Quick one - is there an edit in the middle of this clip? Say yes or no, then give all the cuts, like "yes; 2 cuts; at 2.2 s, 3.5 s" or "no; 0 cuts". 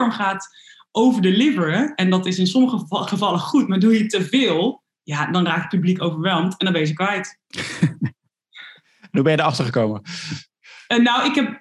no; 0 cuts